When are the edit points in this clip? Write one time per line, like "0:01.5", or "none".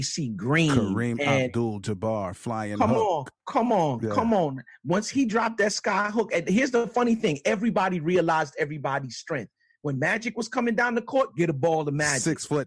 none